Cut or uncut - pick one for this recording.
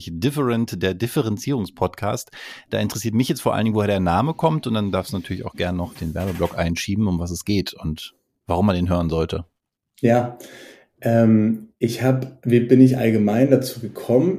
cut